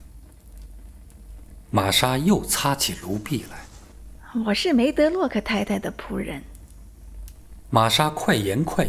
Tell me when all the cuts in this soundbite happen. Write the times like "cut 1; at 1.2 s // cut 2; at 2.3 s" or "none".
none